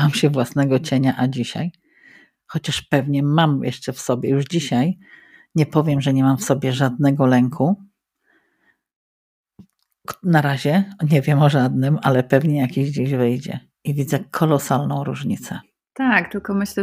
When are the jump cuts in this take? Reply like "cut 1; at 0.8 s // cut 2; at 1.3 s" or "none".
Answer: none